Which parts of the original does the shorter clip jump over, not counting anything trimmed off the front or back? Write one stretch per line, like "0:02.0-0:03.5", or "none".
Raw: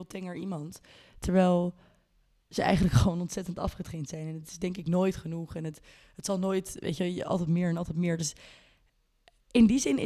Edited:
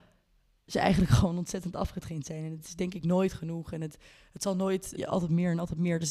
0:06.8-0:07.1